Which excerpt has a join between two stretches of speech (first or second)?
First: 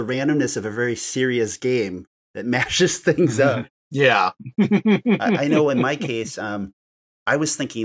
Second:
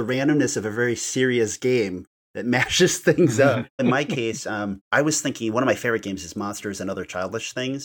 second